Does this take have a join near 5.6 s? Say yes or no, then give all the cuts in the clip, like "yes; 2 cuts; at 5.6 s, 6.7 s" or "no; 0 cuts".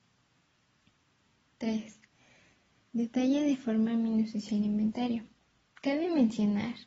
yes; 1 cut; at 5.6 s